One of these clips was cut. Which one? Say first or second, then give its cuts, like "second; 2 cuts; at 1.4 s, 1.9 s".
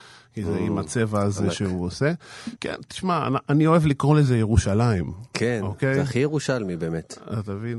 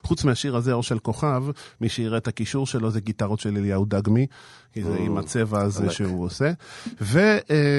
first; 1 cut; at 2.6 s